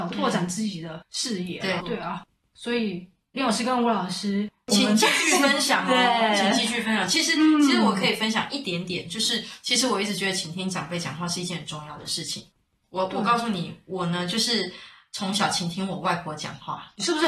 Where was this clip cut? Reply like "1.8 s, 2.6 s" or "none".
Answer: 1.8 s